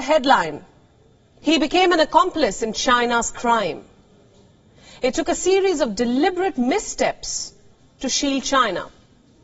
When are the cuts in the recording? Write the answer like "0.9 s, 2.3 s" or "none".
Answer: 1.4 s